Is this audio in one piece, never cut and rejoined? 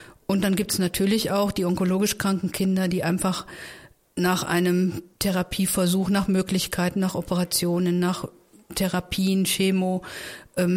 yes; 0 cuts

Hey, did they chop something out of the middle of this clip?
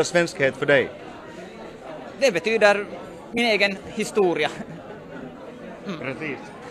no; 0 cuts

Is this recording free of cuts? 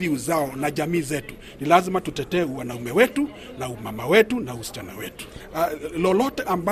yes; 0 cuts

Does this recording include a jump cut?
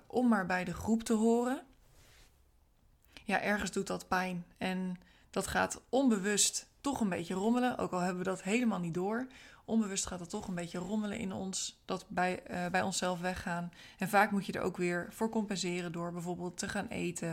no; 0 cuts

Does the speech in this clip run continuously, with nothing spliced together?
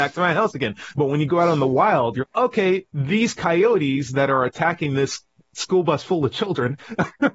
no; 2 cuts; at 0.9 s, 2.2 s

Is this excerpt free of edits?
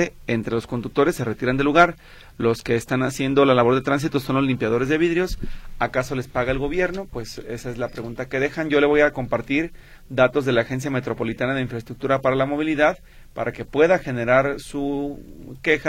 yes; 0 cuts

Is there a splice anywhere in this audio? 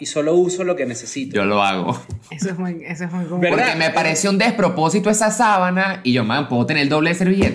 no; 0 cuts

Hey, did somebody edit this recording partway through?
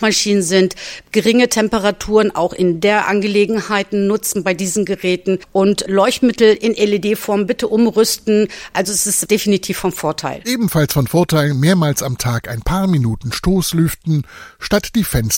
no; 0 cuts

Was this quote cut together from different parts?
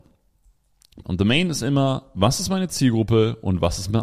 yes; 1 cut; at 1.0 s

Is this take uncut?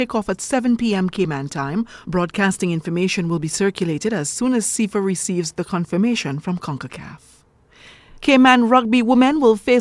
yes; 0 cuts

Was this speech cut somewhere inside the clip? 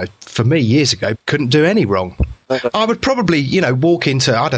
yes; 1 cut; at 1.1 s

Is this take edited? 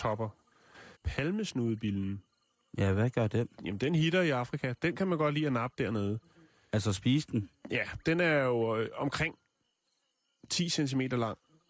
yes; 1 cut; at 1.0 s

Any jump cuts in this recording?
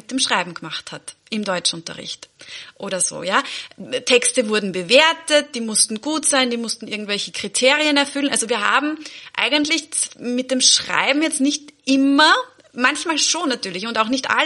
no; 0 cuts

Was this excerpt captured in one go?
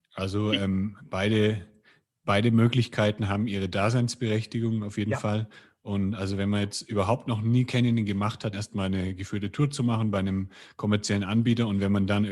no; 1 cut; at 8.5 s

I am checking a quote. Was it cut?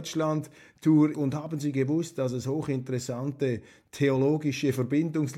yes; 1 cut; at 1.1 s

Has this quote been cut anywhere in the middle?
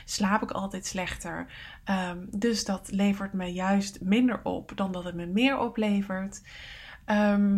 no; 0 cuts

